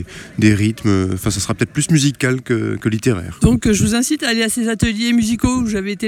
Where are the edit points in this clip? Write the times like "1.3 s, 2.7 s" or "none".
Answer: 3.4 s